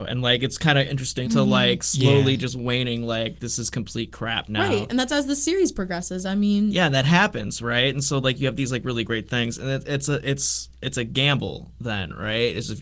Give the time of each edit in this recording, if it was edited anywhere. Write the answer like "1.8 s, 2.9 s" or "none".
1.2 s